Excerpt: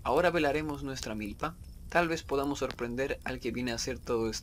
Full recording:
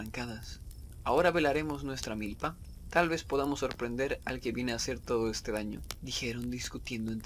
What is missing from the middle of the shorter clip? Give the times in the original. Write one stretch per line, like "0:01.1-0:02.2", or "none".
none